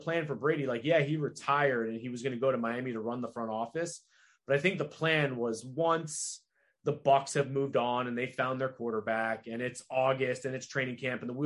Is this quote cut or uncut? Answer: uncut